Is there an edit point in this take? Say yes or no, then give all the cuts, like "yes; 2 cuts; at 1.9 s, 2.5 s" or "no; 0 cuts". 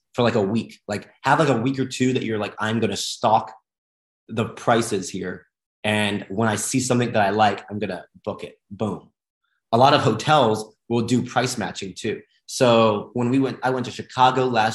no; 0 cuts